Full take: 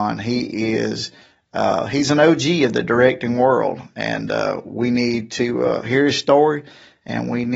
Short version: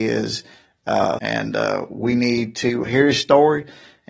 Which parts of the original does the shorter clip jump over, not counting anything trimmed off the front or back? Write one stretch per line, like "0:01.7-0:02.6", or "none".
0:01.9-0:03.9
0:05.6-0:05.8